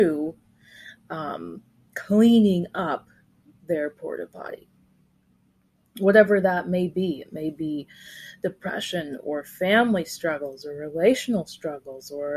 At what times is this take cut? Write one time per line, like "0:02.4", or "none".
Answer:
none

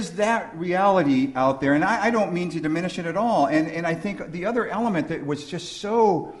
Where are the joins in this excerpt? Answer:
none

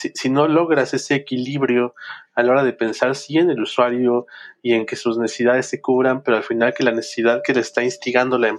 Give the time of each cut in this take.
none

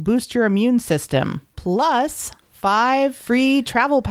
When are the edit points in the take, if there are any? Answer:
0:01.5

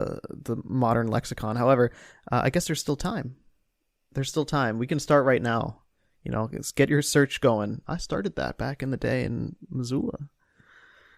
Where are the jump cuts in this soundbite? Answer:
0:07.8

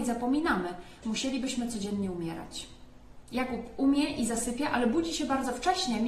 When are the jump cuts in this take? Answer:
0:01.0
0:03.2

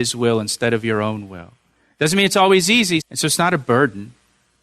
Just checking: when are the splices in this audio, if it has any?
0:03.0

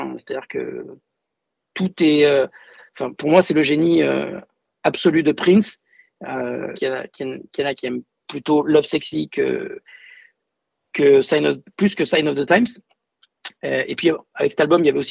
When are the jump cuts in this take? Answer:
0:06.7

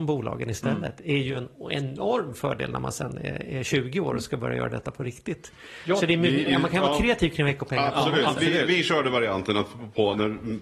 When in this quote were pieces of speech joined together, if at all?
0:06.5

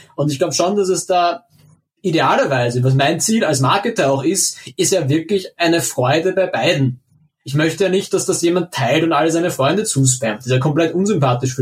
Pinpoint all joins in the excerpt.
none

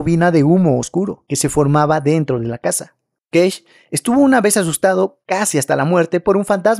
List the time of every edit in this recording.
0:03.2

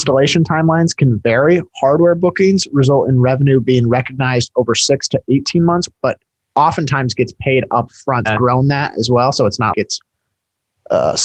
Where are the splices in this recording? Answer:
0:05.9
0:08.3
0:09.7

